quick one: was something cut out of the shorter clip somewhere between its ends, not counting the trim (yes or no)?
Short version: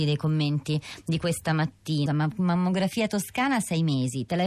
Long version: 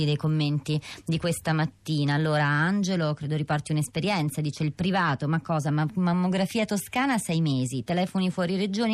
yes